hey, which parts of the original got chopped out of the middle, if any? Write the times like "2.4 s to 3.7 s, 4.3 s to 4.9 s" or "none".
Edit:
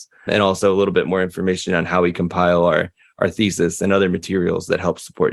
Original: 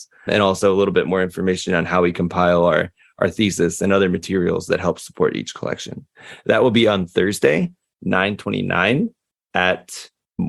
none